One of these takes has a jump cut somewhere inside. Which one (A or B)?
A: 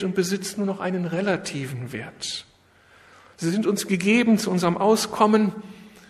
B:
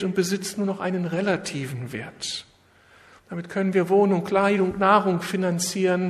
B